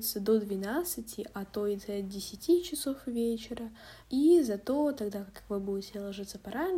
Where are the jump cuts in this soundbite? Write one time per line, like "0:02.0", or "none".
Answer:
0:04.0